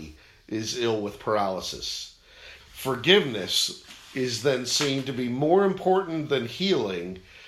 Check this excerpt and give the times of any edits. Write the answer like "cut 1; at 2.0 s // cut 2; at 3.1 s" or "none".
cut 1; at 2.6 s